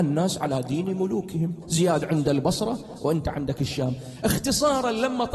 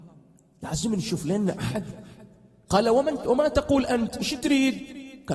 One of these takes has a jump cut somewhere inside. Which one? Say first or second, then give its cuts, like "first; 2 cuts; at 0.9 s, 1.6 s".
first; 1 cut; at 1.6 s